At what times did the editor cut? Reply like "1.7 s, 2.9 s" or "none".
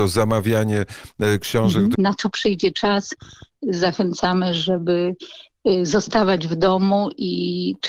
2.0 s